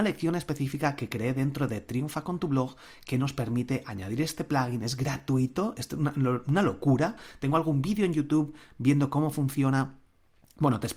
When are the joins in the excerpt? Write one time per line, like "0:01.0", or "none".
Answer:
none